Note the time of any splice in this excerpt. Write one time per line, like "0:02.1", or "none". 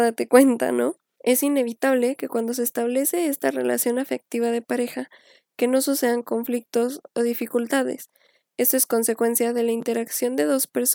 0:01.2